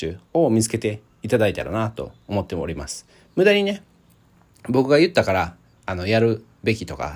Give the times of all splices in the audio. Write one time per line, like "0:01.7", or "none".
none